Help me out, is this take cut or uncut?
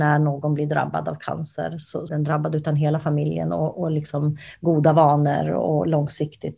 cut